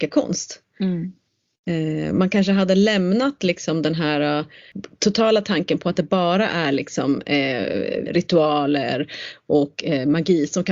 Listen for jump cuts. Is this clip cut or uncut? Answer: cut